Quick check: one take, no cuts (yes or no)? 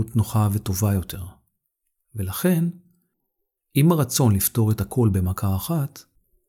yes